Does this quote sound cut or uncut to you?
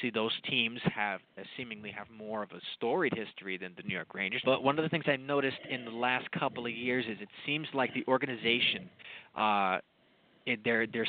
cut